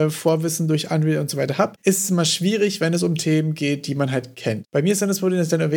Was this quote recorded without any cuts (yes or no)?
yes